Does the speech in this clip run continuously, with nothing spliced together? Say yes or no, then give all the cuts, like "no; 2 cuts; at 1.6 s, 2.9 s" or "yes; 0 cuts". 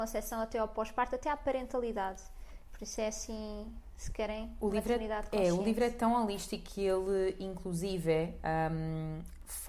yes; 0 cuts